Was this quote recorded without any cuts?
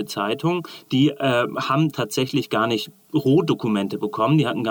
yes; 0 cuts

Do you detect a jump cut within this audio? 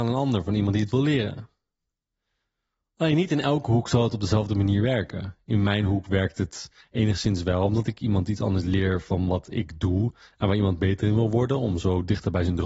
no; 0 cuts

